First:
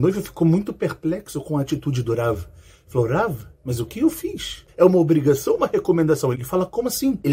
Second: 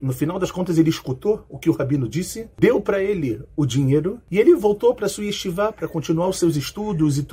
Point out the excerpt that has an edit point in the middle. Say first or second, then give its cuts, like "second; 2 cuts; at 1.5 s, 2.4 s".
first; 2 cuts; at 4.7 s, 6.3 s